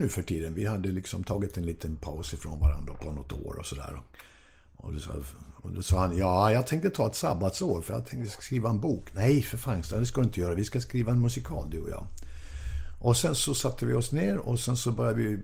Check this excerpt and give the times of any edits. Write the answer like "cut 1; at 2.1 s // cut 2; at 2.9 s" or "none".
none